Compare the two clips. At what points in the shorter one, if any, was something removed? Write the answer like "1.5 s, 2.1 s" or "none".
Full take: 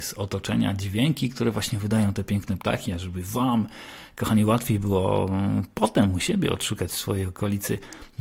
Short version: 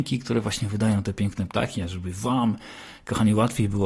none

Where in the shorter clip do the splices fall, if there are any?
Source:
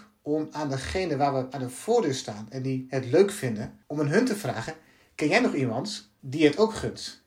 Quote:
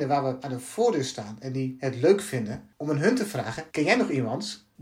3.7 s

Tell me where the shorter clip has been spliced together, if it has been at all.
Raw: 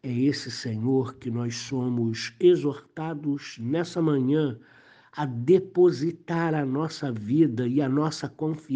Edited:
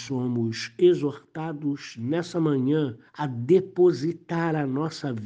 3.1 s

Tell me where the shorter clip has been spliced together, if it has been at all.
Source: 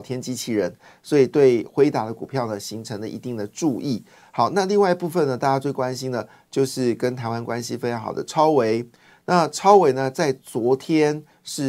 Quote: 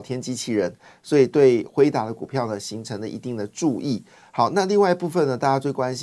none

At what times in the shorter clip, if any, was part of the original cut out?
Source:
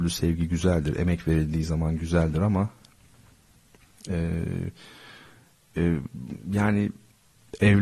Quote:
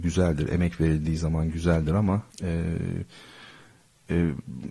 2.3 s

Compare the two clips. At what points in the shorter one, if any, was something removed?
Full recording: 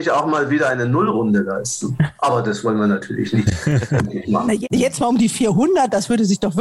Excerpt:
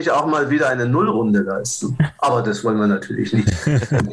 none

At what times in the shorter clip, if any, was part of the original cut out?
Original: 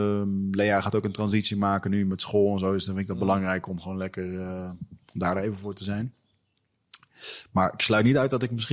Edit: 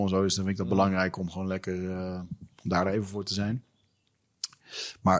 none

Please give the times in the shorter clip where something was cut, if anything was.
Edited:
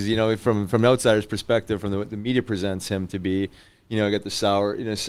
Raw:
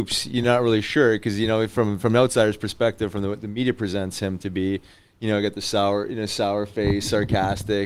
none

